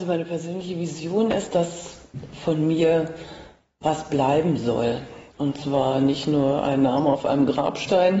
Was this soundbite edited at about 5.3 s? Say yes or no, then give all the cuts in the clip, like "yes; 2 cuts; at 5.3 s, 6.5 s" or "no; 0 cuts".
yes; 1 cut; at 5.3 s